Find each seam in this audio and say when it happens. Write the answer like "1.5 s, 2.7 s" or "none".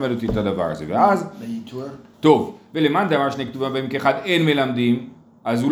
2.1 s